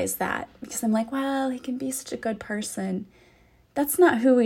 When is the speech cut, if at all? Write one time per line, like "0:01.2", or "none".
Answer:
none